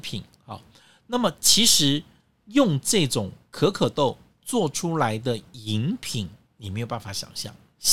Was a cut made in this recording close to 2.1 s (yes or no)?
no